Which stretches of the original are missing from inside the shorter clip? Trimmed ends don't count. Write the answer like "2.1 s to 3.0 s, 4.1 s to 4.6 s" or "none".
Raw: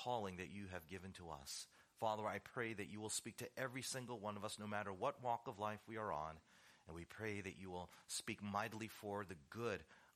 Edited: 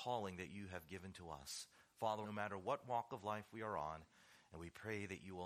2.2 s to 4.6 s